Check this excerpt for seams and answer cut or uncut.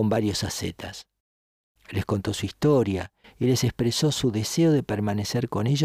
uncut